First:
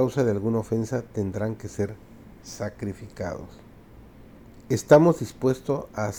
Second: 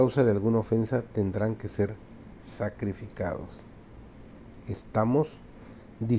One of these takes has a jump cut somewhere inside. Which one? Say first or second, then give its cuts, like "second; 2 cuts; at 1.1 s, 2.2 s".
first; 1 cut; at 4.6 s